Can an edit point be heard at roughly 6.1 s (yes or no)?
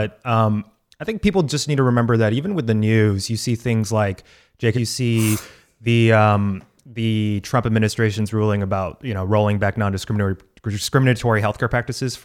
no